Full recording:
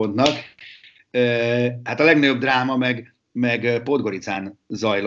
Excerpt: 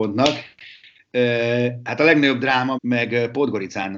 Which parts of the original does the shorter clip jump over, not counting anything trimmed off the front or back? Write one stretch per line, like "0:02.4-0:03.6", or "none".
0:02.7-0:03.3